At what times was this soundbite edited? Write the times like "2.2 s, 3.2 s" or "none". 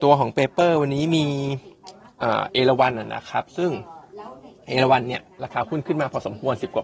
none